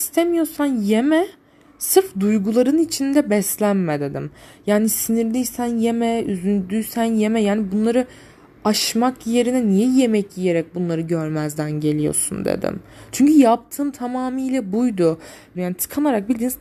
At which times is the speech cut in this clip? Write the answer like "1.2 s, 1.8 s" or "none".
15.5 s